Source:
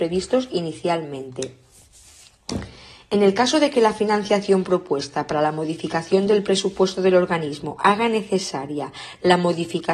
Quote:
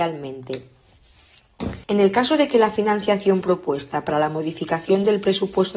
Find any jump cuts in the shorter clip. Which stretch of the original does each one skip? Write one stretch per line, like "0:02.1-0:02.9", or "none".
0:02.7-0:03.1